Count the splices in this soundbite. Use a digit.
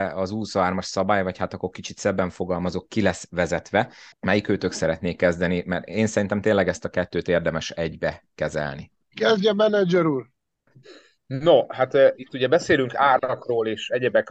1